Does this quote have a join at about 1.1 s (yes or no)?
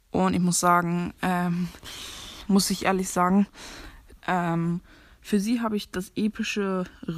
no